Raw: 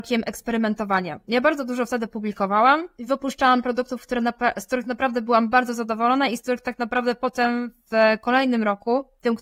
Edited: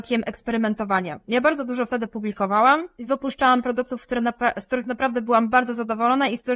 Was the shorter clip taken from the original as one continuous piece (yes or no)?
yes